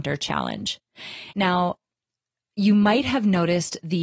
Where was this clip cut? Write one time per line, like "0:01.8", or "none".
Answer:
0:01.3